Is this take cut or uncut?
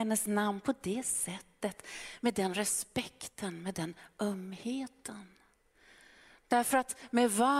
uncut